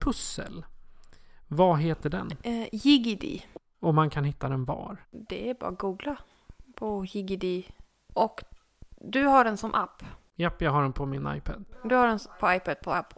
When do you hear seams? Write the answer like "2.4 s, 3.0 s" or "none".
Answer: 5.0 s, 8.1 s